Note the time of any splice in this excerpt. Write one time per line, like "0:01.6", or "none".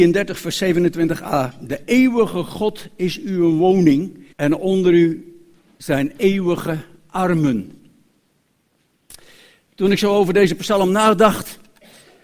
0:04.3